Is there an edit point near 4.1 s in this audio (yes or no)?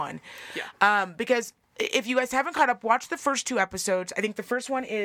no